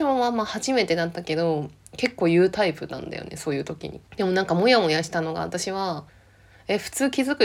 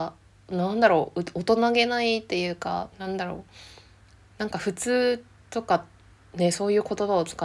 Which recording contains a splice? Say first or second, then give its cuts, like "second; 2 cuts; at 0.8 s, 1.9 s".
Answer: first; 2 cuts; at 4.1 s, 6.1 s